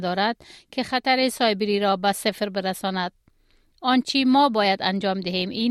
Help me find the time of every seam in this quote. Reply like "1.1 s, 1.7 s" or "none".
none